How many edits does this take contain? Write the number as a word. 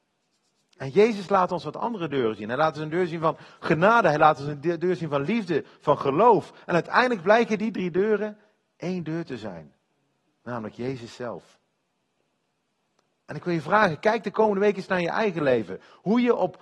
zero